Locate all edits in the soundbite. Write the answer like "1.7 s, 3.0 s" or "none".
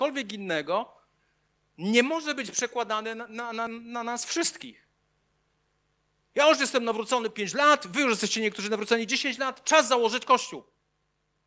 3.7 s

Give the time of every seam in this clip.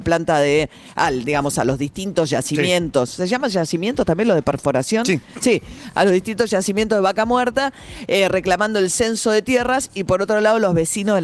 none

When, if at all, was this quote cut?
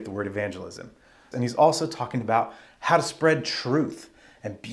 1.3 s

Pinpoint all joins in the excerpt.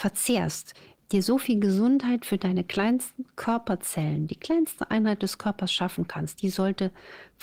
1.0 s

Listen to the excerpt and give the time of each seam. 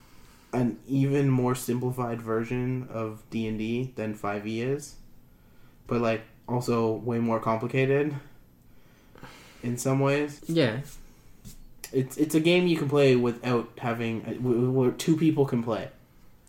10.4 s

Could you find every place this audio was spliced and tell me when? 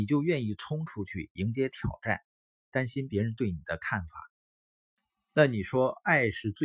2.6 s

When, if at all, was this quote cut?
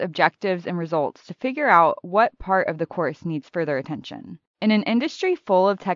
4.5 s

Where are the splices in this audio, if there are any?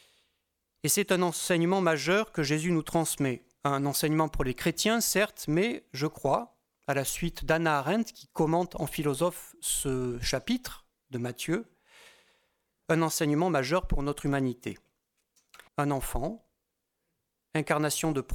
15.7 s

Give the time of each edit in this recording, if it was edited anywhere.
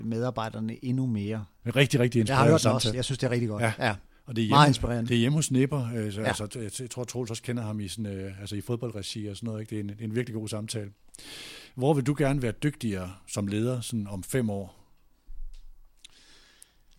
1.6 s, 2.9 s

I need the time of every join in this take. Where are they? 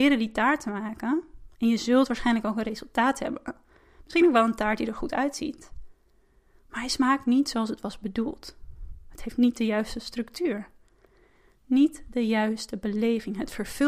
none

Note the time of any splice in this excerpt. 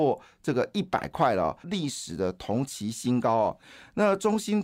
1.6 s

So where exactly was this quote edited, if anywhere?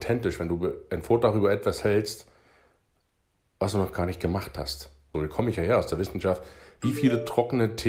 5.1 s

